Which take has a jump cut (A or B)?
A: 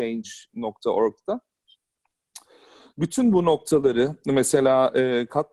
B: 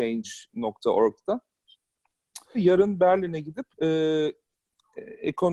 B